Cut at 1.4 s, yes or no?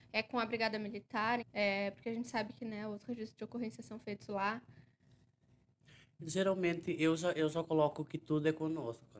yes